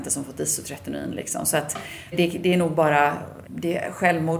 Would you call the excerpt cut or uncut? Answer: cut